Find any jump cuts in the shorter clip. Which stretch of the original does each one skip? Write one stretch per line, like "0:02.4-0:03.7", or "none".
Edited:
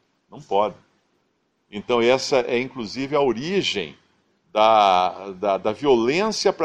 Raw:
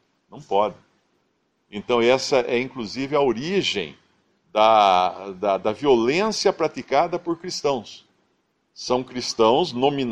none

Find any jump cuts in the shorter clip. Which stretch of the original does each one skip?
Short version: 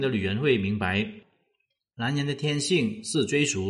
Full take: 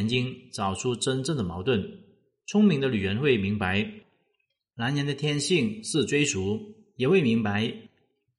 none

